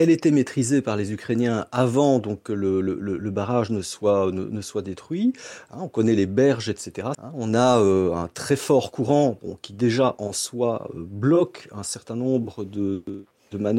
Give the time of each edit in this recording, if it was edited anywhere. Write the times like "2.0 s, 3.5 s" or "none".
7.1 s